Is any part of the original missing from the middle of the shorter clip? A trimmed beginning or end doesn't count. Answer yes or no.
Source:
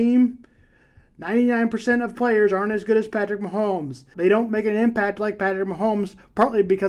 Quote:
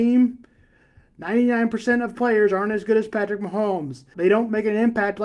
no